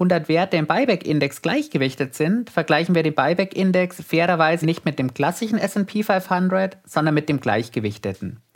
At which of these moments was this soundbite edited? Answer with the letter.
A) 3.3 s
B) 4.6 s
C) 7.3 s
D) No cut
B